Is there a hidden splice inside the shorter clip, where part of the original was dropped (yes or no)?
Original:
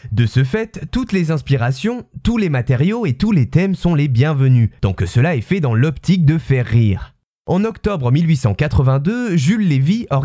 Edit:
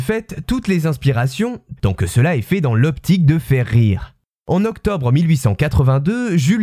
yes